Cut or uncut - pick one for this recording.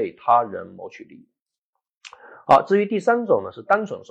uncut